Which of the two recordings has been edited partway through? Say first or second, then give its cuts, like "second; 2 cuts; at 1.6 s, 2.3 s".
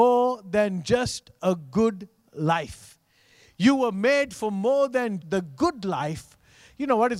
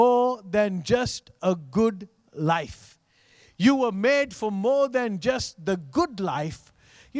first; 1 cut; at 5.2 s